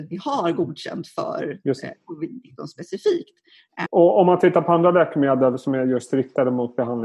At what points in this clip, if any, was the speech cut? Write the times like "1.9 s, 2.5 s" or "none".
3.9 s